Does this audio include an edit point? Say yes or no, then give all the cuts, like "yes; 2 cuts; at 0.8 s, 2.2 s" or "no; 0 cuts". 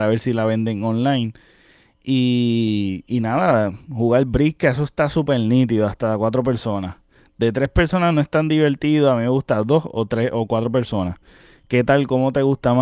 no; 0 cuts